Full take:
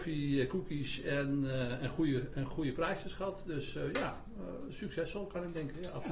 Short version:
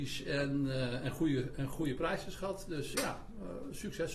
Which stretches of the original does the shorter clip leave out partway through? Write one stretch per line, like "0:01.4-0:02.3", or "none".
0:03.7-0:03.9

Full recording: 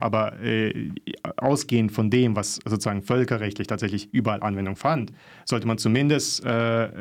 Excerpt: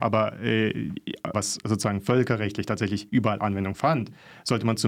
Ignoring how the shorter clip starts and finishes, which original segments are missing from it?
0:01.3-0:02.3

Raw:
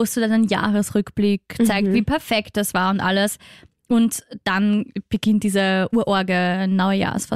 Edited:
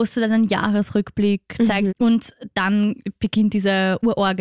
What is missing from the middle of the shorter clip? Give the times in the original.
0:01.9-0:03.8

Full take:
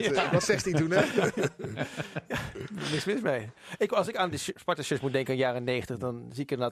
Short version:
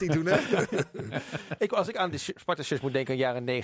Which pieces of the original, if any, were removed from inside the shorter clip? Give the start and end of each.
0:02.2-0:03.8

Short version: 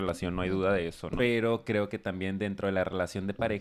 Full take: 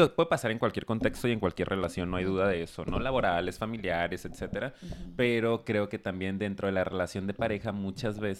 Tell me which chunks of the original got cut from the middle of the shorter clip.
0:02.9-0:05.2

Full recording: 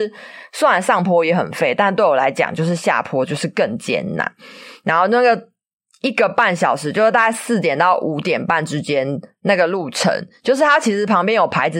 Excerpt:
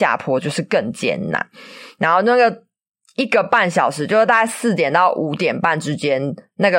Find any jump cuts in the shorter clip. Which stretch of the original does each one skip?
none

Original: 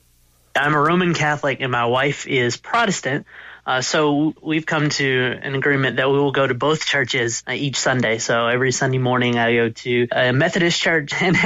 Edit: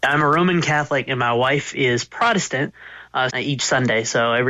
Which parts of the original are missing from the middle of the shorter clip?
0:03.8-0:07.4

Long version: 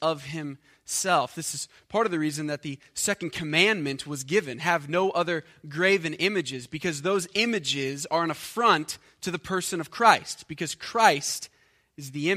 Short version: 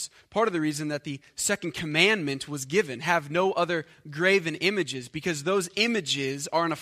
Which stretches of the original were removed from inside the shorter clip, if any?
none

